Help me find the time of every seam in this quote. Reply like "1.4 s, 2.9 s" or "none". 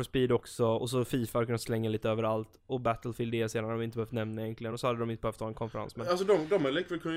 none